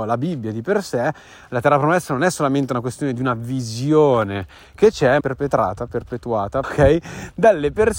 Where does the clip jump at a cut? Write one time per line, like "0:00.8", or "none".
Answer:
0:05.2
0:06.6